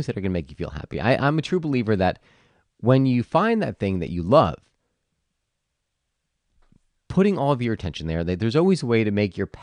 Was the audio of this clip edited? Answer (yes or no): no